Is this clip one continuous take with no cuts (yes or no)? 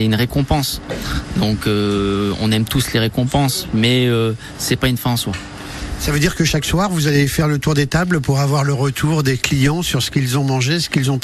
yes